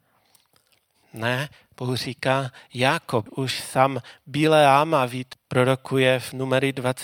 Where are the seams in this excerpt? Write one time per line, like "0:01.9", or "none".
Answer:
0:03.3
0:05.3